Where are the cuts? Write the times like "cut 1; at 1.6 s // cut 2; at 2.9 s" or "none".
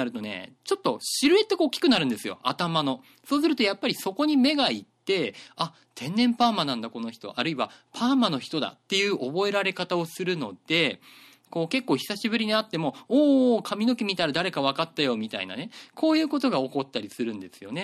none